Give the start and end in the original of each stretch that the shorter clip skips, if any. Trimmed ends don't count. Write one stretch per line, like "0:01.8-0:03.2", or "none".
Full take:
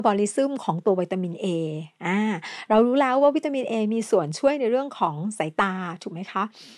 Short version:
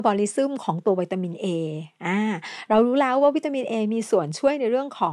none